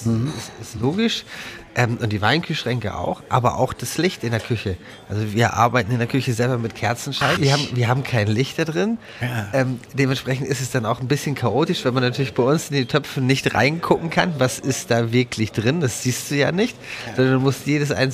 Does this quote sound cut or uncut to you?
cut